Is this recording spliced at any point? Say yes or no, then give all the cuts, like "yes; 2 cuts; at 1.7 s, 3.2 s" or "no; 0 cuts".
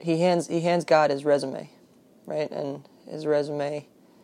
no; 0 cuts